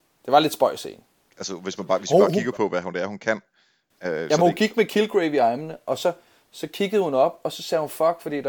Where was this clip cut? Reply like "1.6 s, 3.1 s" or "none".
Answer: none